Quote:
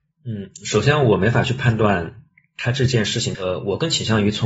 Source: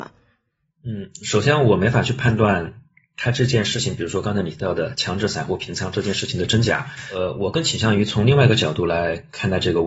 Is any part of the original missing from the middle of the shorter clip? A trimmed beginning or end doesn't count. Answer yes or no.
yes